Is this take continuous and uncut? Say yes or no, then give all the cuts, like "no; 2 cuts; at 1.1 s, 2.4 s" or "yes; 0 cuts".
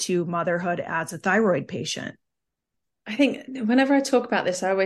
yes; 0 cuts